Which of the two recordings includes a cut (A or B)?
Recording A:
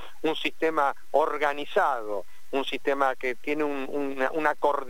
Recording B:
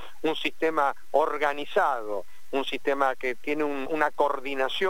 B